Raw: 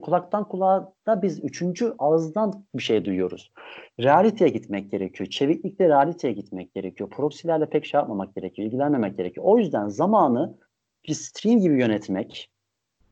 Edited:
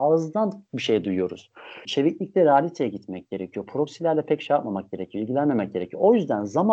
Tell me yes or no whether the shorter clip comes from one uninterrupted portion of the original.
no